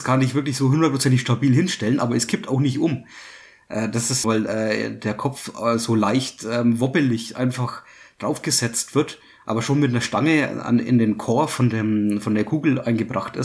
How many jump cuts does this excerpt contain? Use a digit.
1